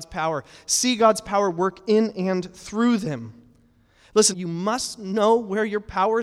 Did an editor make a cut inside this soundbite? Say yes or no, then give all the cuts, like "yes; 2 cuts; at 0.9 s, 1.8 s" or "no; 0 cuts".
yes; 1 cut; at 4.3 s